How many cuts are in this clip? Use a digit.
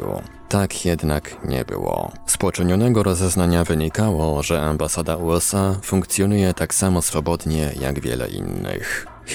0